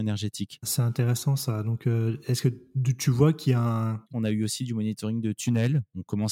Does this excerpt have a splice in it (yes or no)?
yes